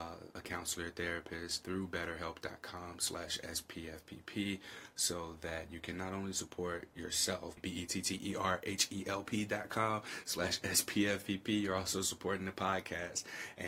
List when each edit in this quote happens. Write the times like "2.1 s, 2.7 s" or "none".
7.6 s